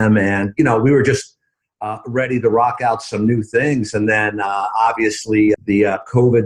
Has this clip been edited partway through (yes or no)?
yes